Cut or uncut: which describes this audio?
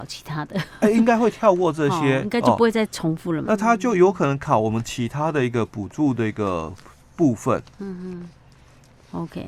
cut